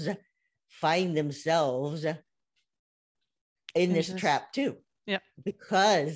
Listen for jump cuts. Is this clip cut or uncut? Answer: uncut